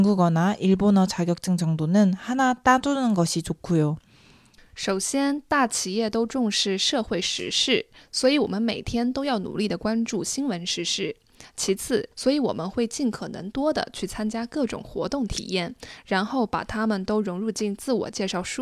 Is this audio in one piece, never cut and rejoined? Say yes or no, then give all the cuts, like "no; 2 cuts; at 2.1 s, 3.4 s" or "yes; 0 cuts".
no; 2 cuts; at 4.6 s, 12.1 s